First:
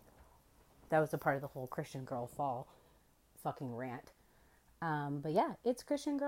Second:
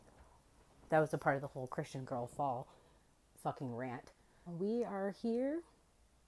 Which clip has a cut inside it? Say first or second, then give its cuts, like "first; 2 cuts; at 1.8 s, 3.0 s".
second; 1 cut; at 4.5 s